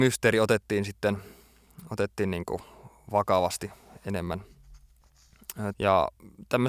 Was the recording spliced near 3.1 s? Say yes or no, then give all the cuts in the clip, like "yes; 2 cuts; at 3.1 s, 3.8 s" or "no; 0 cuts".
no; 1 cut; at 5.7 s